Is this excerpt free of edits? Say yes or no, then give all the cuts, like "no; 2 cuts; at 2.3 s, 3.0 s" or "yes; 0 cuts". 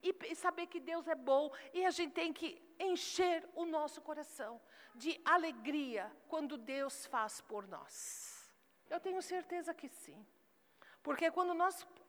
no; 1 cut; at 8.9 s